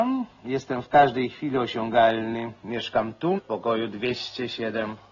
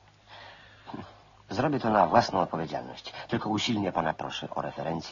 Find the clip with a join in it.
first; 1 cut; at 3.4 s

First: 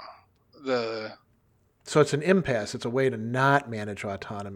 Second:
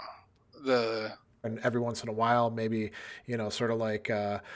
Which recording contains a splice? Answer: second; 1 cut; at 1.4 s

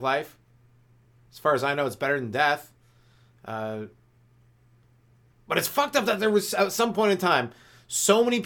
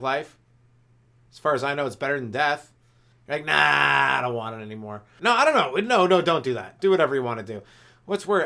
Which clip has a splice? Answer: second; 3 cuts; at 3.1 s, 5.2 s, 6.8 s

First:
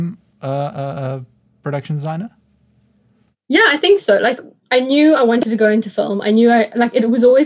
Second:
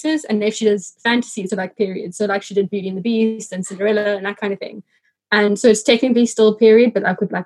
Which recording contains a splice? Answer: second; 1 cut; at 1.5 s

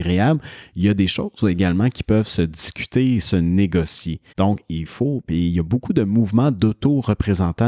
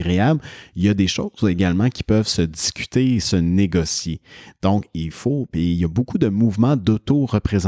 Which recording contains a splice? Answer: first; 1 cut; at 4.3 s

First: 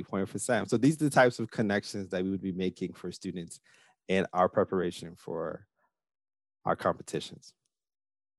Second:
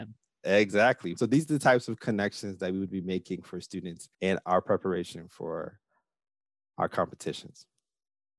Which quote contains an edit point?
second; 2 cuts; at 1.2 s, 4.1 s

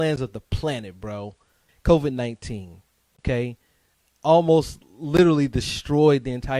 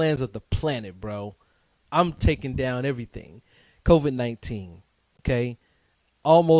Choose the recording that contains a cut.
first; 1 cut; at 1.7 s

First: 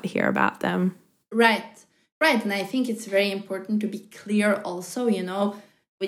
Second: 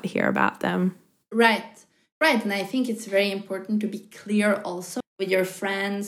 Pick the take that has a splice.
second; 1 cut; at 5.0 s

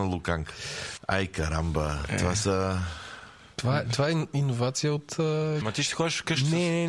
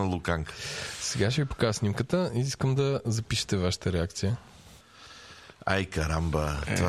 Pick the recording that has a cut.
first; 2 cuts; at 1.0 s, 5.6 s

